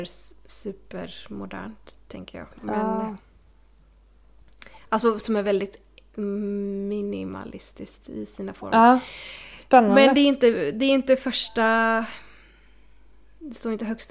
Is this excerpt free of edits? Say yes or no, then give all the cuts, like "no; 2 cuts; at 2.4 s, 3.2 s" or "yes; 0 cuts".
yes; 0 cuts